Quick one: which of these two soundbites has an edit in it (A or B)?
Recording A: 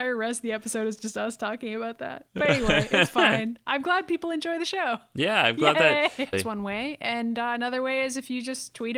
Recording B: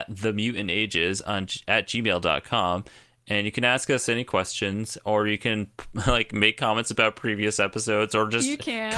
A